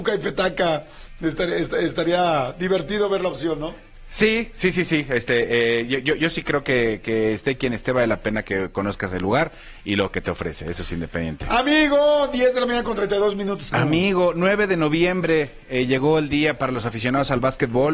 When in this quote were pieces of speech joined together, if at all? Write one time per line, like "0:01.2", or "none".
0:13.7